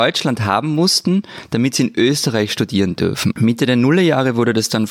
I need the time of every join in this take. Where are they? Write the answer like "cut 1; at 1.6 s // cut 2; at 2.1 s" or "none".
cut 1; at 3.3 s